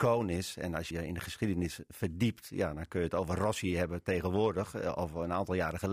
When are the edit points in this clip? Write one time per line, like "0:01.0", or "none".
0:00.9